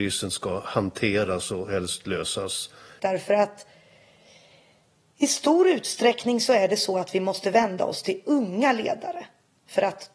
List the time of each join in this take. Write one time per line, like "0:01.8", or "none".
0:03.0